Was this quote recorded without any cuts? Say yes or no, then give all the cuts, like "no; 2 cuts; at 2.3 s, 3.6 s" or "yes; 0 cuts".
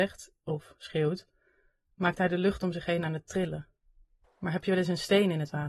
no; 1 cut; at 4.2 s